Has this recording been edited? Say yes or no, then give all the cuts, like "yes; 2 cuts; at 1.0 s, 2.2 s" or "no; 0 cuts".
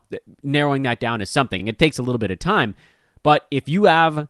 no; 0 cuts